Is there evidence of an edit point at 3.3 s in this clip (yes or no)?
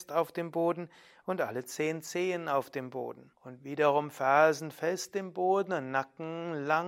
yes